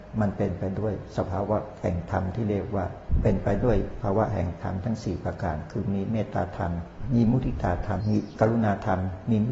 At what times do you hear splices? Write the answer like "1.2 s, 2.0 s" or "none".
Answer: 8.0 s